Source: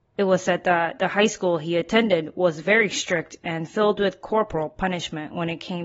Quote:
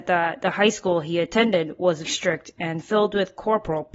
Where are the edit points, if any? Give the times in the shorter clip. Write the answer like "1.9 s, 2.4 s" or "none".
2.0 s